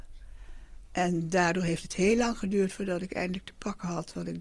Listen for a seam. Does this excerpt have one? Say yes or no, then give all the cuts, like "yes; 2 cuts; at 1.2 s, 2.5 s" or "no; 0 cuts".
no; 0 cuts